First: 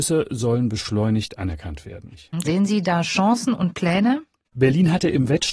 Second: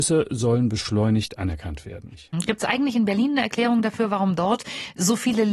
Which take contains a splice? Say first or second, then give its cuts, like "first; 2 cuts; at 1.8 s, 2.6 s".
first; 1 cut; at 2.4 s